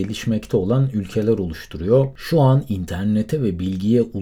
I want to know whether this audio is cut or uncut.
uncut